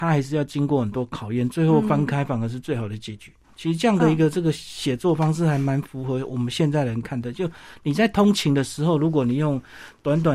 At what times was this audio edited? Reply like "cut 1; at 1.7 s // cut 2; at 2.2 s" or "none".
cut 1; at 3.4 s